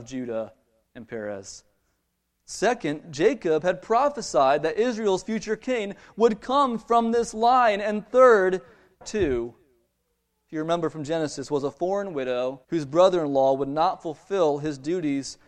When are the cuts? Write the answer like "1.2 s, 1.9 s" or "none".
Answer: 9.0 s, 12.6 s